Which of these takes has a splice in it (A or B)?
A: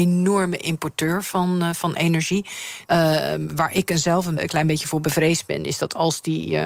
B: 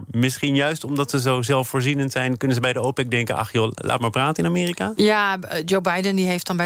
A